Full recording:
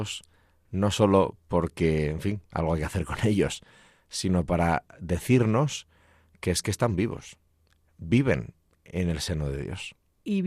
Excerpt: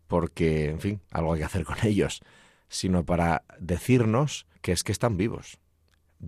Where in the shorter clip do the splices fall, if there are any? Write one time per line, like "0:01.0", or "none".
0:04.5